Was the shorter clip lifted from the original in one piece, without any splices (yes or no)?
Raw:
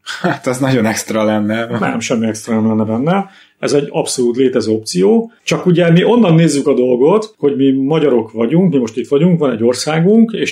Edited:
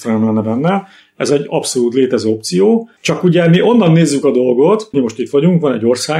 no